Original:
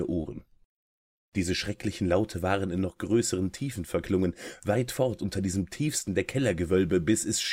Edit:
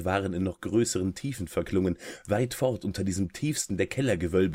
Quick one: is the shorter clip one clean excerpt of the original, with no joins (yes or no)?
yes